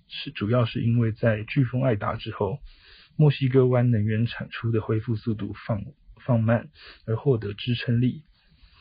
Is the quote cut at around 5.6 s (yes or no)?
no